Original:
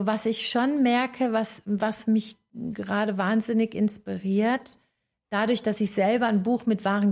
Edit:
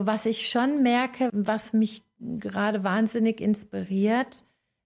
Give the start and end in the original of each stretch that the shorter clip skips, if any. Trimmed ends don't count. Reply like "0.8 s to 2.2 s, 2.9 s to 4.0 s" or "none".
1.3 s to 1.6 s